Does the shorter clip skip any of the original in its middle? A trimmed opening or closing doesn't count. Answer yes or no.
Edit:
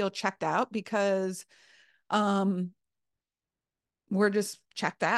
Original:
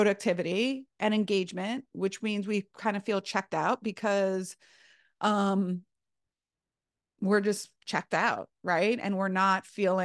no